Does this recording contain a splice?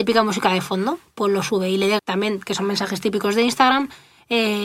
yes; 1 cut; at 2.0 s

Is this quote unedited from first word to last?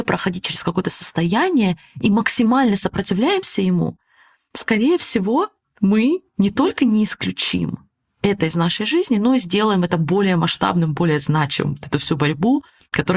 yes; 0 cuts

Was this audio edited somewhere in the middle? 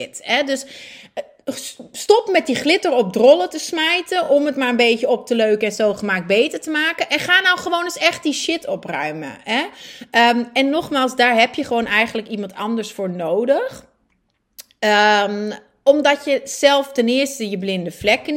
no; 0 cuts

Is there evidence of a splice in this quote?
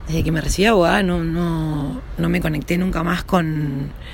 no; 0 cuts

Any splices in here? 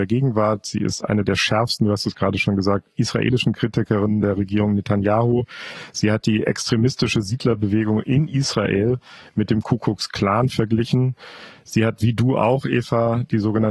no; 0 cuts

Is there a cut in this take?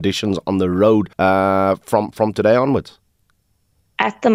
yes; 1 cut; at 1.1 s

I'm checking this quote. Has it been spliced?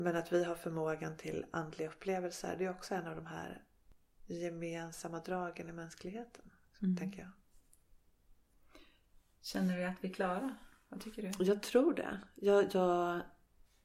no; 0 cuts

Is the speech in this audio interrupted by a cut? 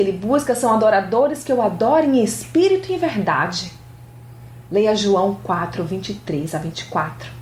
no; 0 cuts

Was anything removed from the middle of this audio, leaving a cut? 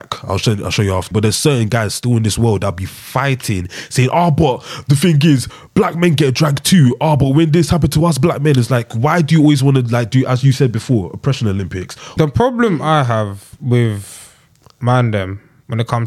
yes; 2 cuts; at 1.1 s, 12.2 s

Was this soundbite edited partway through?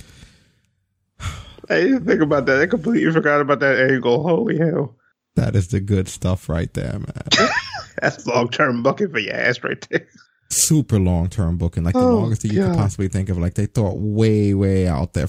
no; 0 cuts

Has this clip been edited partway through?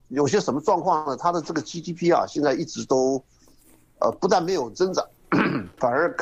no; 0 cuts

